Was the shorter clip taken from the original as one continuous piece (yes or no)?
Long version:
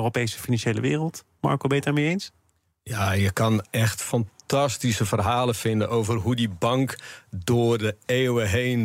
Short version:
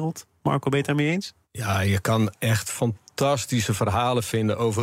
no